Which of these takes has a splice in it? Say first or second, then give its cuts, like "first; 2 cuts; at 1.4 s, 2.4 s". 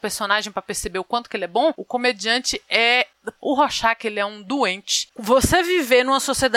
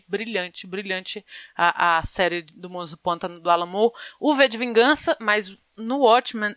first; 3 cuts; at 1.8 s, 3.4 s, 5.1 s